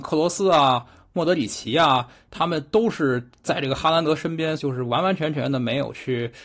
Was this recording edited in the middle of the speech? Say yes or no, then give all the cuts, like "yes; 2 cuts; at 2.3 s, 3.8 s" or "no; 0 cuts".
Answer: yes; 2 cuts; at 3.4 s, 4.6 s